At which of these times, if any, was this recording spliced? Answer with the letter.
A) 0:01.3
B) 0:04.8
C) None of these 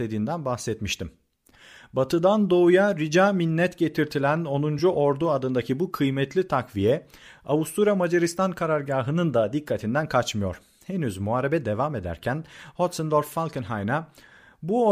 C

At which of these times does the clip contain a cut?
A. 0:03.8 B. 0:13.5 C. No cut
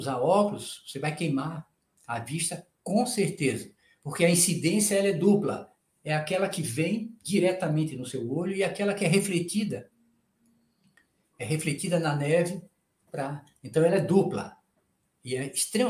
C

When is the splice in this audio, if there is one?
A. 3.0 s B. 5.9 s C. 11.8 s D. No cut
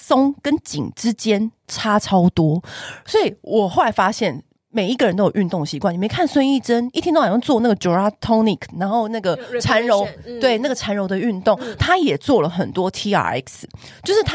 D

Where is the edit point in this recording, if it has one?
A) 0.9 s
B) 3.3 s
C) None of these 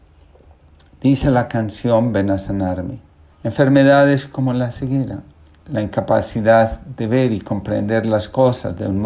B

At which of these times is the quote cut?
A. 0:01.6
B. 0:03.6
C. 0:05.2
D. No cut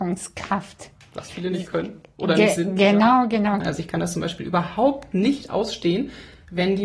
B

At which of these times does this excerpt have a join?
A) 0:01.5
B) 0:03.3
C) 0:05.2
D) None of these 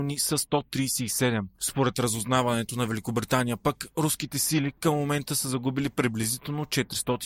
A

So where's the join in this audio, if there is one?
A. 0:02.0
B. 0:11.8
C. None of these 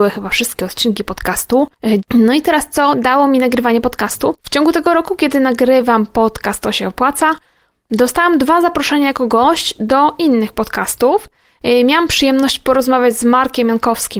A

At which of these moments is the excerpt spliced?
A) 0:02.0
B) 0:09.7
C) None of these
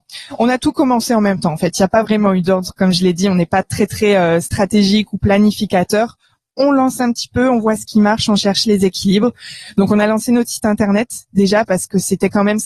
C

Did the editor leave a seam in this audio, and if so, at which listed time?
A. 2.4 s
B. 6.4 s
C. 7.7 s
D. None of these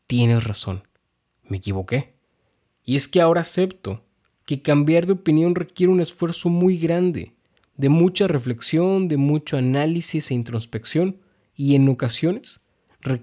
D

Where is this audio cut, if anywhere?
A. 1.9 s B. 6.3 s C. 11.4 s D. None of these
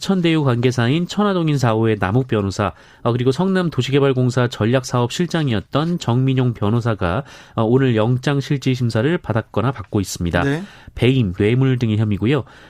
C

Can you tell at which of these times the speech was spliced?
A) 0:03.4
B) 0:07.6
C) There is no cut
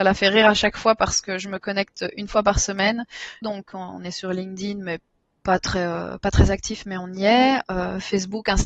A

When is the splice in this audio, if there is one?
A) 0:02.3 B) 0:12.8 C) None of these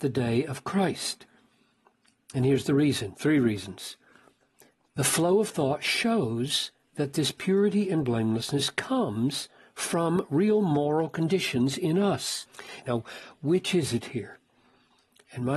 B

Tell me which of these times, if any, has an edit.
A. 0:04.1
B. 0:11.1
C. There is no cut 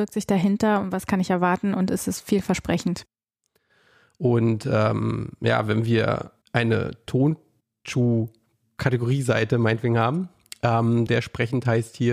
B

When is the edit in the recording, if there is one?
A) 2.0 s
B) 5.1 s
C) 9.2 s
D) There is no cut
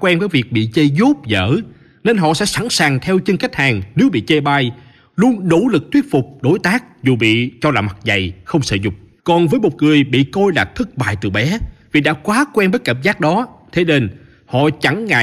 C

